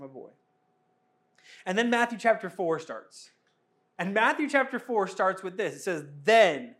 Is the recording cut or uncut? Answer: uncut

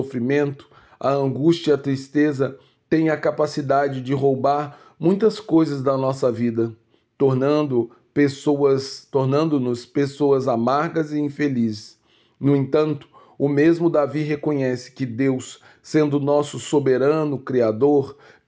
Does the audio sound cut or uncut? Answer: uncut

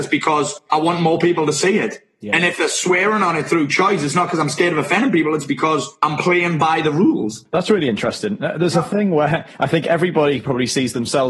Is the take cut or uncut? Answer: uncut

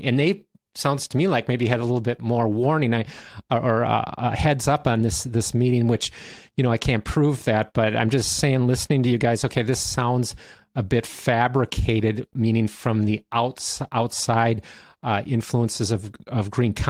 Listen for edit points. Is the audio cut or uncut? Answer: uncut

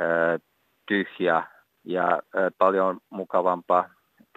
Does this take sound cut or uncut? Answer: cut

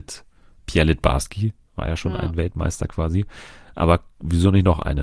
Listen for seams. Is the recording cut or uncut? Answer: uncut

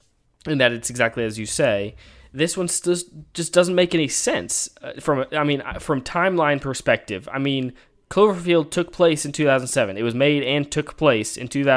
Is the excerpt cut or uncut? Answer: uncut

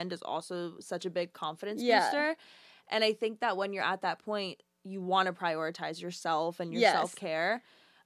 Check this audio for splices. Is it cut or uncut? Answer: uncut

